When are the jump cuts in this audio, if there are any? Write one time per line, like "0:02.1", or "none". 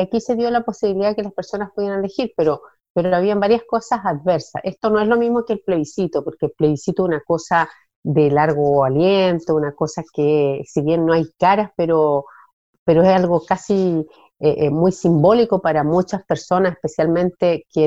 none